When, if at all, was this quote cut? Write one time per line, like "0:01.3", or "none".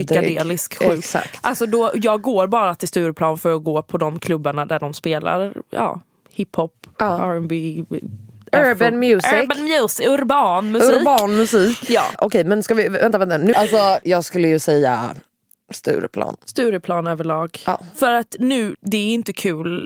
0:13.5
0:18.7